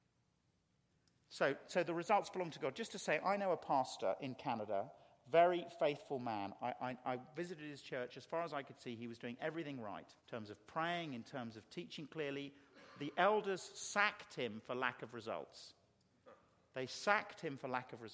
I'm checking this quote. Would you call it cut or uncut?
cut